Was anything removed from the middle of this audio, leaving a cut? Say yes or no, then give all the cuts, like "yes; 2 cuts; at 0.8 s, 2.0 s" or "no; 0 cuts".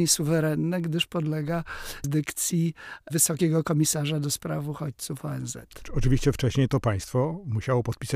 yes; 1 cut; at 2.0 s